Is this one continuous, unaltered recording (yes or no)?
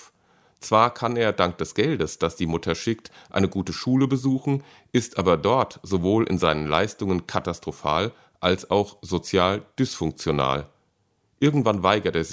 yes